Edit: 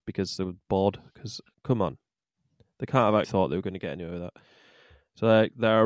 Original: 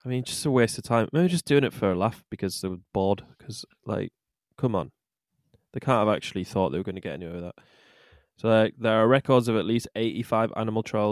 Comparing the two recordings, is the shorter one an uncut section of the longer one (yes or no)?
no